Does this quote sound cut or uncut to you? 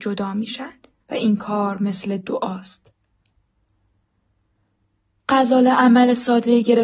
cut